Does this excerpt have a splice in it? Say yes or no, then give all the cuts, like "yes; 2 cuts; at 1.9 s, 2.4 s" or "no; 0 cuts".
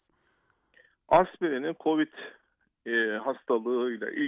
no; 0 cuts